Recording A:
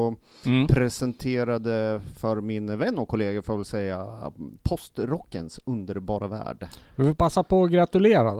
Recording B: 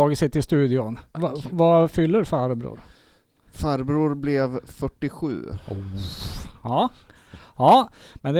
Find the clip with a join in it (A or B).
B